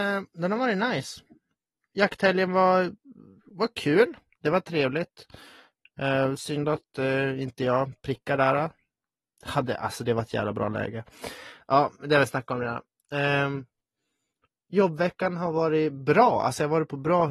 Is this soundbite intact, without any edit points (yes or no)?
yes